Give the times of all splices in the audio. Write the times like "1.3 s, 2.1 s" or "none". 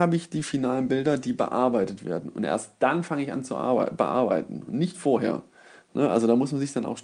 none